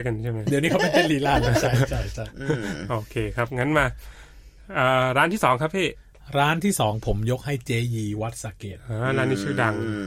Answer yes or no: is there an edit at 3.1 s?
no